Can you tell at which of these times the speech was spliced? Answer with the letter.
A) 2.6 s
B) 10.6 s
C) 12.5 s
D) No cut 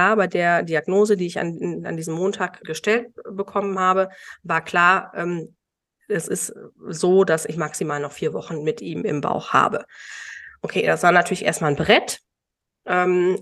A